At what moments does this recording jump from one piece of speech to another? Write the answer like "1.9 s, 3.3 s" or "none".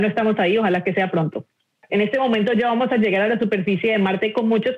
1.9 s